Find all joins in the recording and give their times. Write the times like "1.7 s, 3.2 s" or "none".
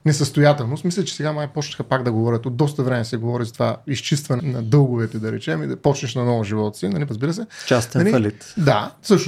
4.4 s, 7.1 s